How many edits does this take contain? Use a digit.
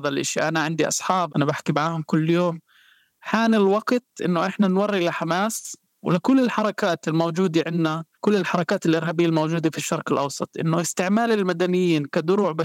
2